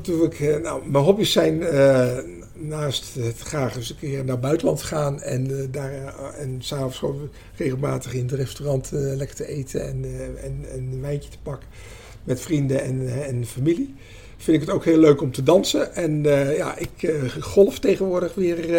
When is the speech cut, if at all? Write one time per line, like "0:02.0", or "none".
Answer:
none

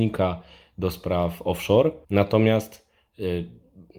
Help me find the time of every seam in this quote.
0:02.0

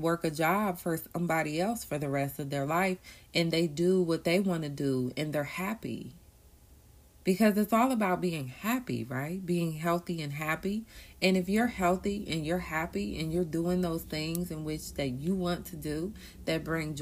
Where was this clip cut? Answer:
none

